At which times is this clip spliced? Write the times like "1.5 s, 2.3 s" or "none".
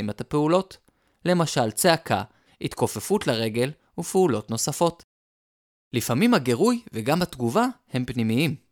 2.5 s